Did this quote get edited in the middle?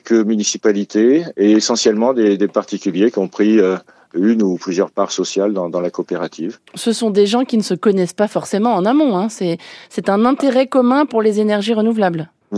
no; 0 cuts

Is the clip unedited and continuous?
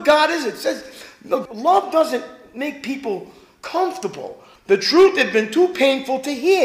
no; 2 cuts; at 1.5 s, 4.6 s

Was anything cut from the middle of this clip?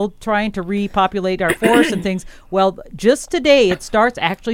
no; 0 cuts

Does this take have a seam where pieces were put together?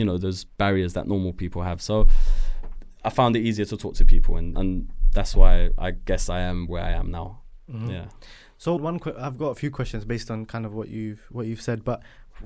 yes; 2 cuts; at 4.5 s, 8.8 s

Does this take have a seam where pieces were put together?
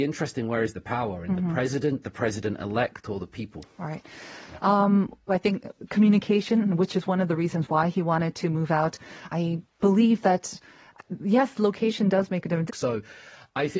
yes; 3 cuts; at 5.3 s, 9.3 s, 12.7 s

